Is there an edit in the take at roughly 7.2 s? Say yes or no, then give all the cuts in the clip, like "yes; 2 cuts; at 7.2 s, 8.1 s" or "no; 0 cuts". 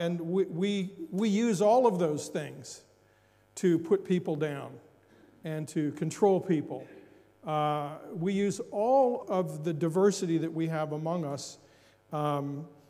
no; 1 cut; at 9.2 s